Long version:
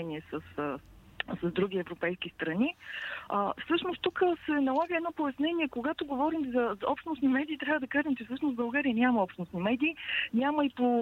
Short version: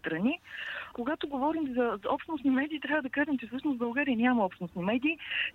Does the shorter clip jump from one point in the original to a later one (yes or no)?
yes